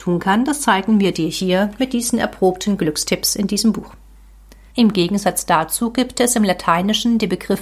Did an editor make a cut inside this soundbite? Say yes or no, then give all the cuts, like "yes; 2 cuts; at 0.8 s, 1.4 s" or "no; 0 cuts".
yes; 1 cut; at 4.7 s